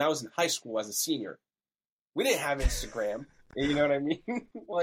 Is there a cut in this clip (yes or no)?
no